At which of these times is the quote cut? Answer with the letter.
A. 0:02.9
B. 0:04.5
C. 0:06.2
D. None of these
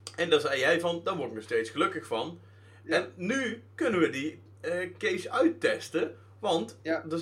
D